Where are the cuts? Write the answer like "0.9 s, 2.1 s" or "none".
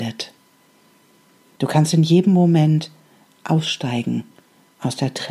1.6 s